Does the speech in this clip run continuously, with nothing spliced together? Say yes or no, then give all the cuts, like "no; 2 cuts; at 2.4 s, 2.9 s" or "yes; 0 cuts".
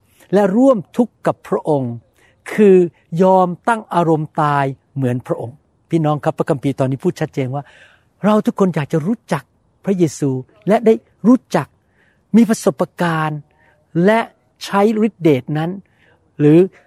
yes; 0 cuts